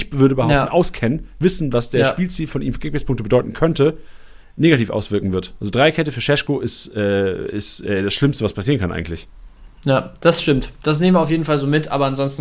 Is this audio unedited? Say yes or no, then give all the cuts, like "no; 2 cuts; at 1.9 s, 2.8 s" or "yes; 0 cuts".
yes; 0 cuts